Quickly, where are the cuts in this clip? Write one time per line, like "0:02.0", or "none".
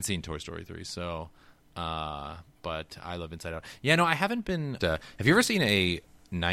0:04.8